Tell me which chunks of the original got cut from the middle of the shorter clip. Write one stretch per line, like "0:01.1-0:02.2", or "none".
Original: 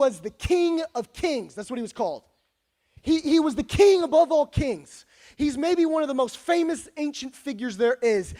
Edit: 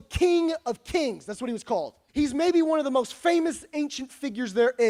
0:02.4-0:05.3

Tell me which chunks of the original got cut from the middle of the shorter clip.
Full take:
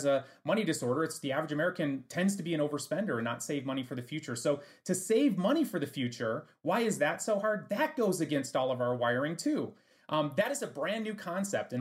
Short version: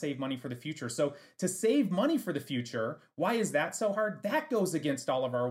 none

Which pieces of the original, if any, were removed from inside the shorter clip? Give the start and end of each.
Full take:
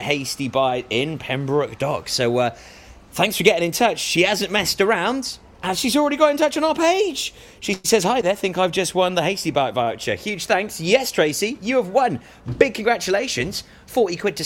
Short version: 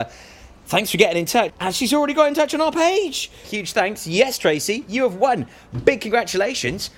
0:04.0-0:05.5
0:07.5-0:10.2

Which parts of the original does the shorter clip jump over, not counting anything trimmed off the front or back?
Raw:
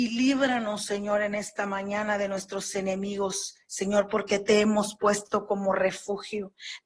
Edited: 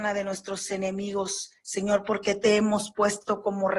none

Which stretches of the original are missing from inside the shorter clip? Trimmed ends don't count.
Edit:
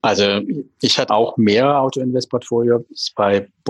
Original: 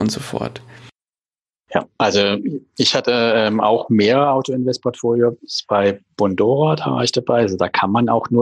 0:03.0-0:03.6

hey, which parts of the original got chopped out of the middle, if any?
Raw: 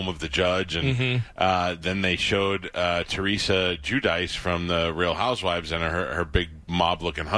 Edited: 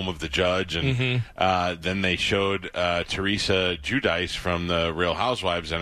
none

